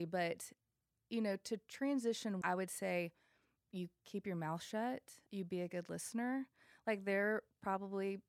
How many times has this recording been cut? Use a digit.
2